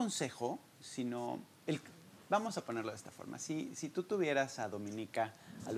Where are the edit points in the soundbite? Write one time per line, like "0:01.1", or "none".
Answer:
none